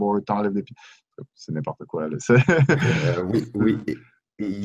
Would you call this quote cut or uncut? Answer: uncut